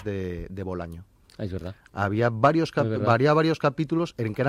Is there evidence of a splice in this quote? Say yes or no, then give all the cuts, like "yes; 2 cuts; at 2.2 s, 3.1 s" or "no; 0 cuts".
no; 0 cuts